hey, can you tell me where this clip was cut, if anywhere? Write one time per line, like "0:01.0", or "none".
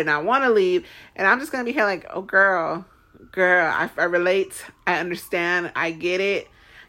none